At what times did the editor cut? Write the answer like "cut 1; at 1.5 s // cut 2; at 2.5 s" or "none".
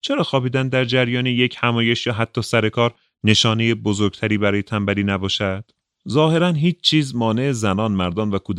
cut 1; at 5.9 s